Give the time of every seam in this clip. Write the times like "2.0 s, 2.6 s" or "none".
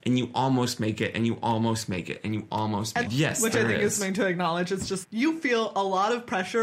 3.1 s, 5.0 s